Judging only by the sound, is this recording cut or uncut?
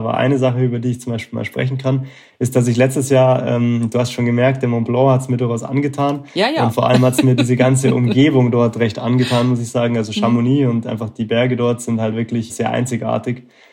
cut